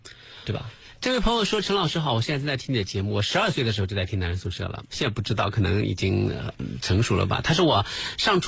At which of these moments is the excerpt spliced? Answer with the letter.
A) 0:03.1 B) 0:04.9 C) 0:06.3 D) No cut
B